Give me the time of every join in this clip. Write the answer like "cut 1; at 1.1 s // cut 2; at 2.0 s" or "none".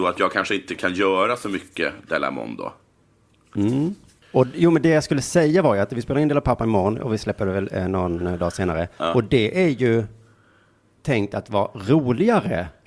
cut 1; at 4.2 s